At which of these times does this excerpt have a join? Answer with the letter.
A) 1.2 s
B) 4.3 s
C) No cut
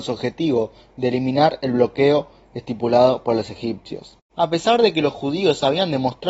B